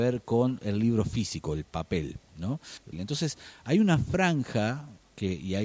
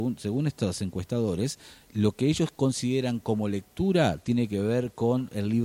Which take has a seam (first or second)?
first